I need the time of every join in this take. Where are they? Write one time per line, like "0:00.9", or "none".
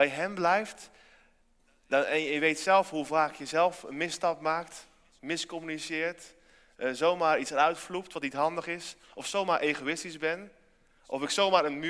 none